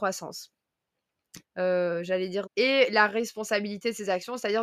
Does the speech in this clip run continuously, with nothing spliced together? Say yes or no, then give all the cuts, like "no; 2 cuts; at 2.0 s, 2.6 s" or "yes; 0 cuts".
no; 2 cuts; at 1.4 s, 2.4 s